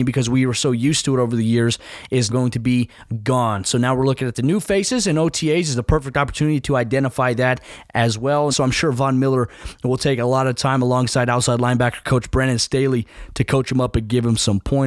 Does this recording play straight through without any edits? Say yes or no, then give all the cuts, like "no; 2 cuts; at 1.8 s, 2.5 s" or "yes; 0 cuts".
no; 2 cuts; at 2.3 s, 8.5 s